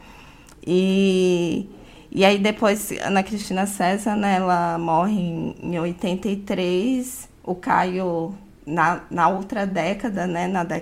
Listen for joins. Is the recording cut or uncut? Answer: uncut